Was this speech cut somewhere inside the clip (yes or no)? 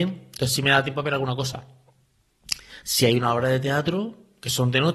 yes